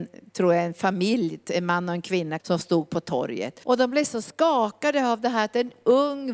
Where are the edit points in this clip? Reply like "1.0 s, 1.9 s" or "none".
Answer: 2.4 s, 3.6 s